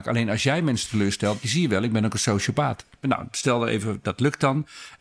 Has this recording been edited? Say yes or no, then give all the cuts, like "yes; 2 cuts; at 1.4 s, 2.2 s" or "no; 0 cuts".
yes; 2 cuts; at 1.4 s, 3.0 s